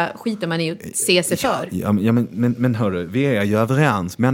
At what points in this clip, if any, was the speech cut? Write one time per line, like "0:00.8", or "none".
none